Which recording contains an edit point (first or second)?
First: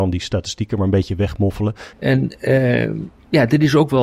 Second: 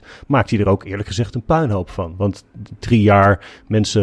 first